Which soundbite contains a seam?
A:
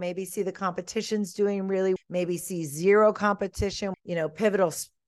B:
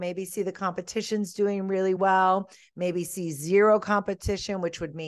A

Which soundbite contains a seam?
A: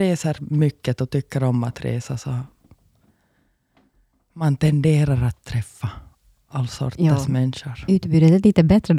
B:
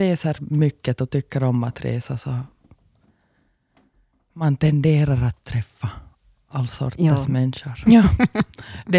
B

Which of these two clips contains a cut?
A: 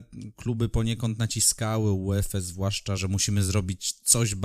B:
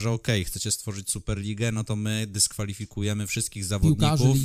A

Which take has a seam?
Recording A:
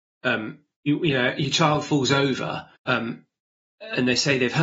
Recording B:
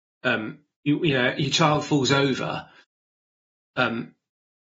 A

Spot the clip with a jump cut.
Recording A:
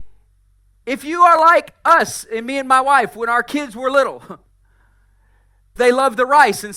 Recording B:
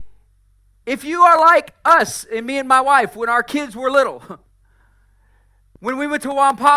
A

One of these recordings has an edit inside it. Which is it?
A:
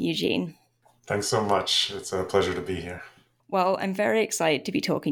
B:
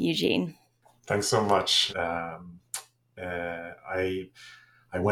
B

